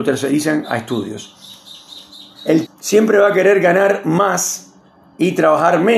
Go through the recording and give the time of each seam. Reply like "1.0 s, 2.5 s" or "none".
2.7 s

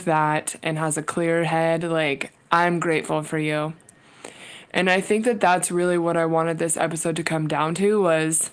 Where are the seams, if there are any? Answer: none

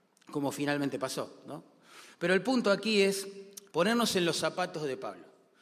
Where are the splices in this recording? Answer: 3.7 s

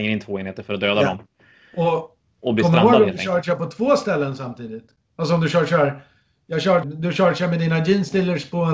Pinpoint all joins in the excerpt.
5.1 s, 6.8 s

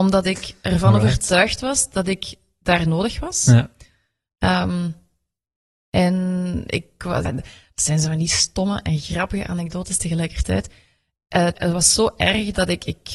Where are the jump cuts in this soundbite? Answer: 7.3 s, 11.5 s

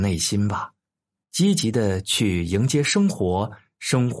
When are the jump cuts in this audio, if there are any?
1.2 s

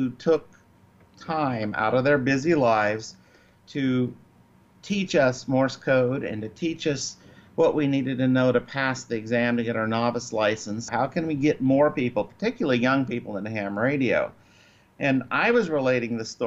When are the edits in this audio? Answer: 10.9 s

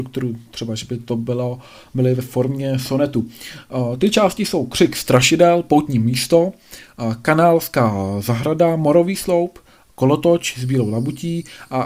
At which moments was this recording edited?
none

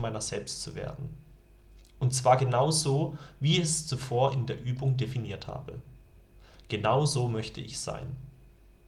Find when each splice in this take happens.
none

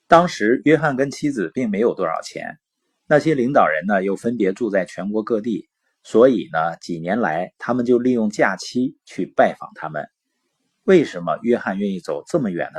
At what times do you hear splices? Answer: none

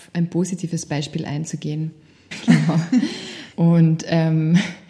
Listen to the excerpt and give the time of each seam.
2.3 s, 3.5 s

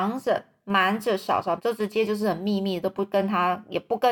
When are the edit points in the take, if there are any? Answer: 1.6 s

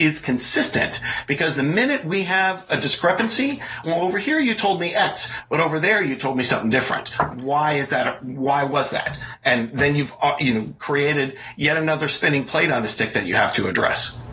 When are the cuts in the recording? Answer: 3.8 s

